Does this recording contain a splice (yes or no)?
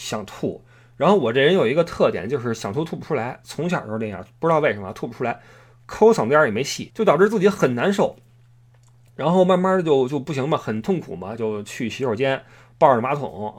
yes